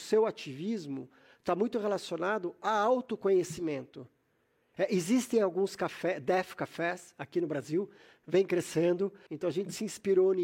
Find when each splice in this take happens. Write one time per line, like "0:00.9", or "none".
0:04.7
0:09.3